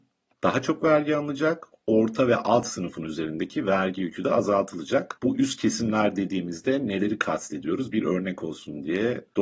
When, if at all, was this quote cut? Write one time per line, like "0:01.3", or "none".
none